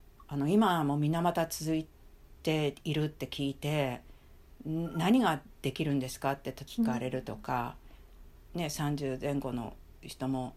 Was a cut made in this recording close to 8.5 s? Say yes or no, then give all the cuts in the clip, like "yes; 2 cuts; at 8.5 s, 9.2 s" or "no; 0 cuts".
yes; 1 cut; at 8.5 s